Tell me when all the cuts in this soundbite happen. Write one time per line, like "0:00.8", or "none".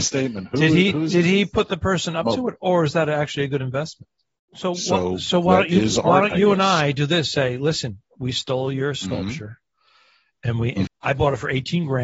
0:04.4
0:10.9

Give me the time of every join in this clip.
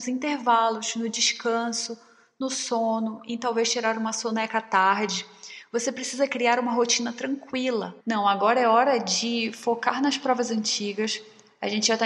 0:08.0

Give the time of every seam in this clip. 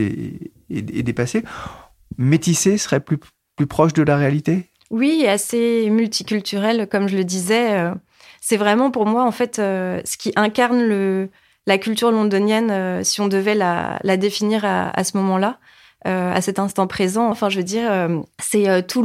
0:17.3

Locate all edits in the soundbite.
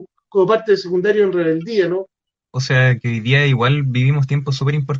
0:02.3

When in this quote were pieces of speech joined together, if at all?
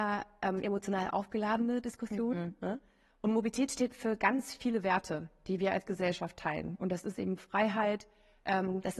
0:03.1

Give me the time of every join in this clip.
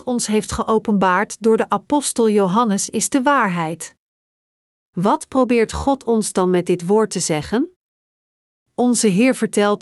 none

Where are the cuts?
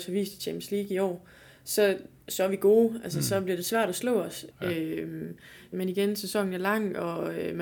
0:04.5
0:05.7

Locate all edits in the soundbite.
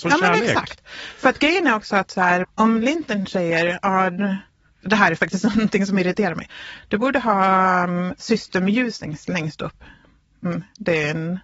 0:02.4

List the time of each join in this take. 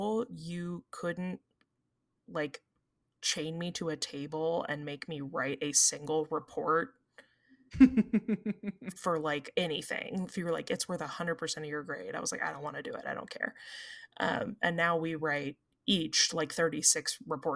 0:09.5

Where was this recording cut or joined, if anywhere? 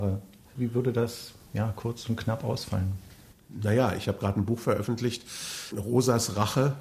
none

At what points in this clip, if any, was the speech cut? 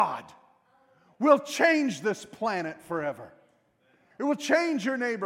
0:04.1

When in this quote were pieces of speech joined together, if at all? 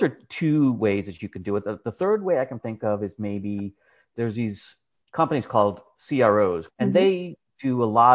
0:02.6
0:06.7

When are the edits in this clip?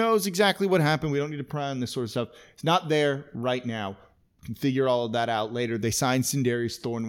none

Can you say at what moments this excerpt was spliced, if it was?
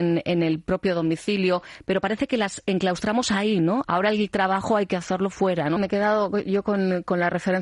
0:03.8
0:05.8

